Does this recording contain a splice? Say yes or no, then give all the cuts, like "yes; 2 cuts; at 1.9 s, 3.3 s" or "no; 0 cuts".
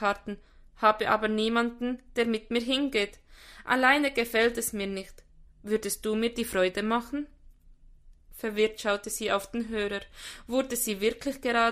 no; 0 cuts